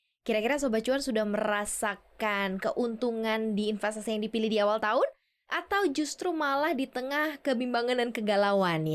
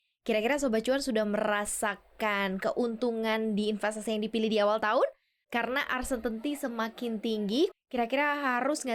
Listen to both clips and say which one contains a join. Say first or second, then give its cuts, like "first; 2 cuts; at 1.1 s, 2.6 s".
second; 2 cuts; at 5.4 s, 7.7 s